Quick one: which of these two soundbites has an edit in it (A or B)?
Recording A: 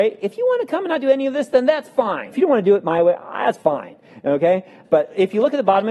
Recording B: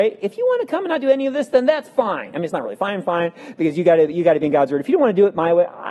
A